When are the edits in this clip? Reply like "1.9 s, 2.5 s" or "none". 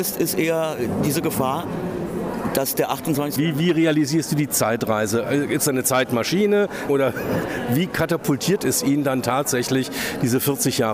3.4 s, 6.9 s